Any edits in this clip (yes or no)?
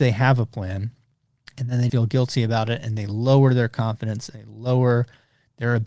yes